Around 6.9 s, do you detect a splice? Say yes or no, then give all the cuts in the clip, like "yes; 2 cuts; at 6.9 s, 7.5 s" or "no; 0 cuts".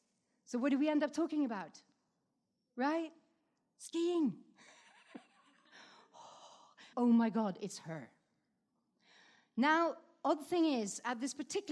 yes; 1 cut; at 6.9 s